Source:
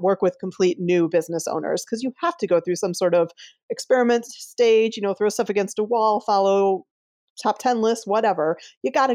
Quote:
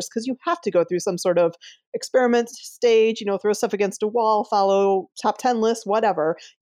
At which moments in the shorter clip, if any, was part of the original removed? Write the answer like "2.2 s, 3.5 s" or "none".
5.1 s